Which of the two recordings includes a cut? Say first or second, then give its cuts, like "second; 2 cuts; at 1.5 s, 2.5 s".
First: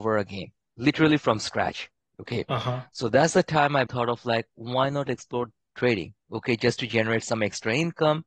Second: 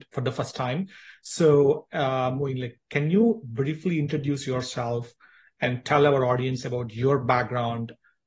first; 1 cut; at 3.9 s